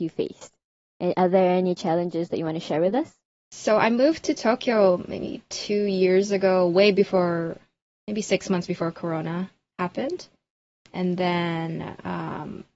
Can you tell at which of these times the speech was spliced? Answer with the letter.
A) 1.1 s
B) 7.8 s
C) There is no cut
C